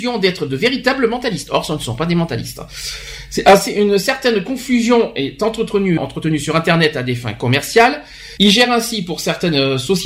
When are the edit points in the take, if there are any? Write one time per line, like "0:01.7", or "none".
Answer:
0:06.0
0:08.4